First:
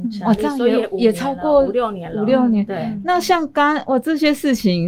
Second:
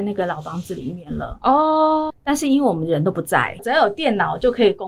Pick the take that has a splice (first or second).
second